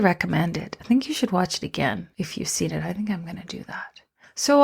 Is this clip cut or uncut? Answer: cut